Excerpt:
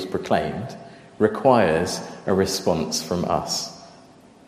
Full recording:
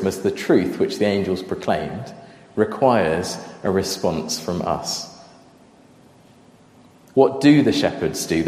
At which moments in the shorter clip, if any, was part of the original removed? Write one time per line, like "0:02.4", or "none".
none